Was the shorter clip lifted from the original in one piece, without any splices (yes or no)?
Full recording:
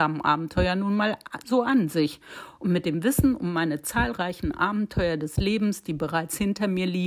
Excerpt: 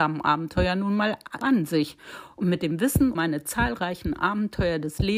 no